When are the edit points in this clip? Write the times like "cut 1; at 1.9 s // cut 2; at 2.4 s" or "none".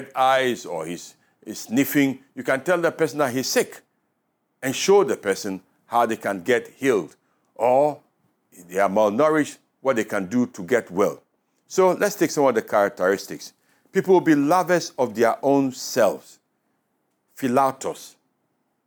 none